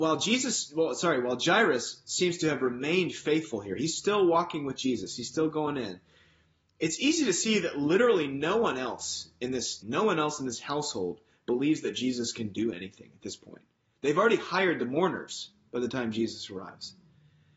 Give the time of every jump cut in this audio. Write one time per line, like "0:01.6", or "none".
0:09.8